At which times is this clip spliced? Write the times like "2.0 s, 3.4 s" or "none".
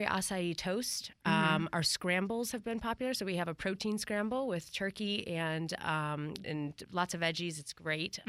6.4 s